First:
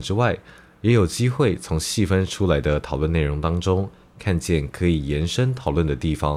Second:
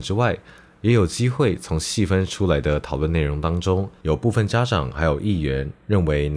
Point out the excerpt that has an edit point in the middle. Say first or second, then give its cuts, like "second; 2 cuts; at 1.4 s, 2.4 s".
second; 1 cut; at 4.0 s